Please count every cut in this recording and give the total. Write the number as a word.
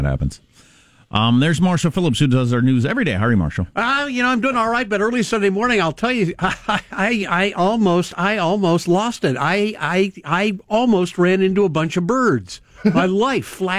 zero